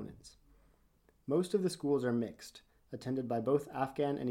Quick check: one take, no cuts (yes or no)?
yes